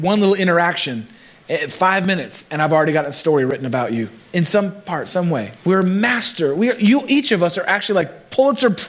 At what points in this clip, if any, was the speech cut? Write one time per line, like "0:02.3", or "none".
0:05.6